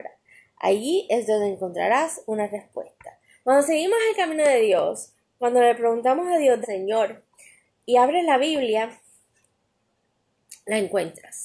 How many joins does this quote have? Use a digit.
2